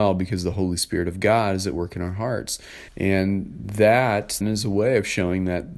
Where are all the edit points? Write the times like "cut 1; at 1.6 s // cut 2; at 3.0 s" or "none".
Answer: cut 1; at 2.9 s // cut 2; at 4.4 s